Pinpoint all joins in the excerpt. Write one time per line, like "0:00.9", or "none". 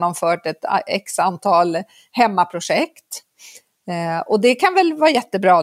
none

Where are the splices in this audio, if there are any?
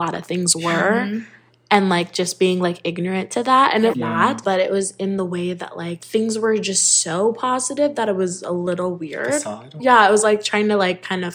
0:03.9
0:09.8

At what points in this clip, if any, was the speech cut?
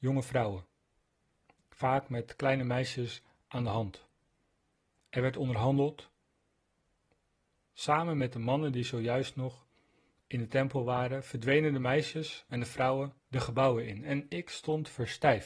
0:13.2

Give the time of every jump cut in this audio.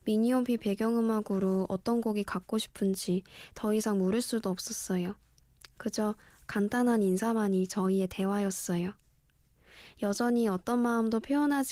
none

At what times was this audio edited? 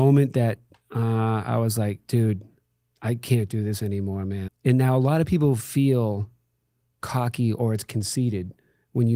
0:04.5

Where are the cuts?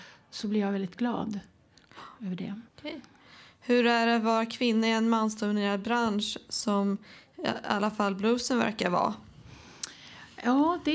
0:02.7

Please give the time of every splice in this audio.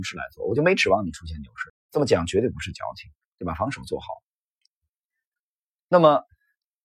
0:01.7
0:03.3

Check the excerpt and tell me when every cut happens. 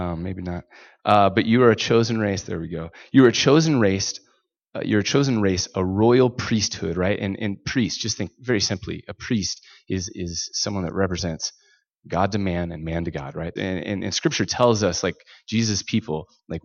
0:13.6

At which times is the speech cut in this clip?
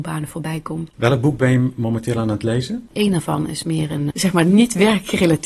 0:02.9
0:04.1

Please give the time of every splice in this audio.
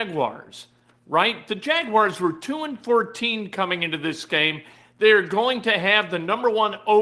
none

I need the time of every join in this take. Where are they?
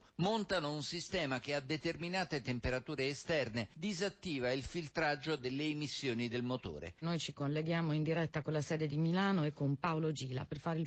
0:07.0

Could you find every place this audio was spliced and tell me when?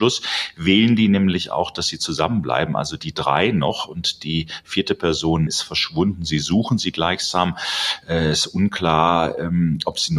0:05.5

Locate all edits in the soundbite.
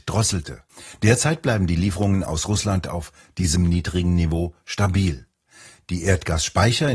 none

